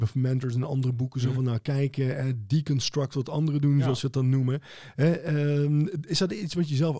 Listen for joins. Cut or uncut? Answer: uncut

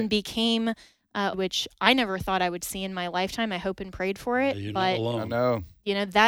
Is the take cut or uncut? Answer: cut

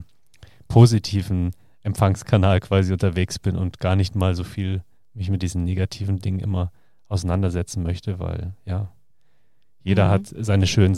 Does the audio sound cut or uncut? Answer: uncut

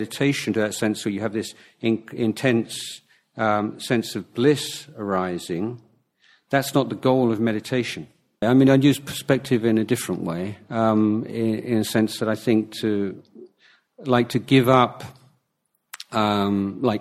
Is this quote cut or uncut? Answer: cut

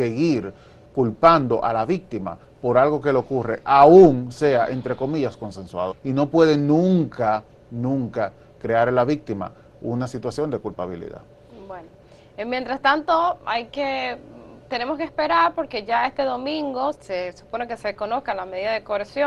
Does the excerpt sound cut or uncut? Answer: cut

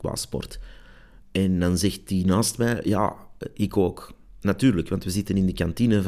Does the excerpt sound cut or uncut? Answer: uncut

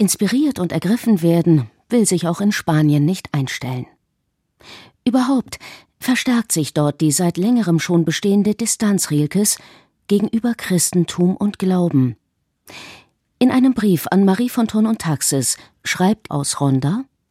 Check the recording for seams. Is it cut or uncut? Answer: cut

